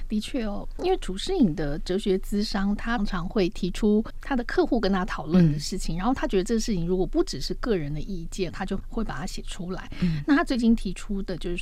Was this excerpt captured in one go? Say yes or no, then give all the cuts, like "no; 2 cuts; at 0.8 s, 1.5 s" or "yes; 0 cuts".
no; 2 cuts; at 3.0 s, 8.5 s